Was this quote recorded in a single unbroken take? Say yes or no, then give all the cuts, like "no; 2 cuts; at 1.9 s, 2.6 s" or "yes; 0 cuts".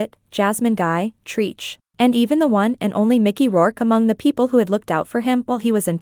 yes; 0 cuts